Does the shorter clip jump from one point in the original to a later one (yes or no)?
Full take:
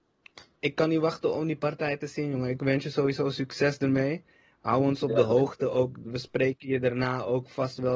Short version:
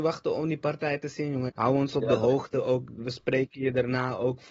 yes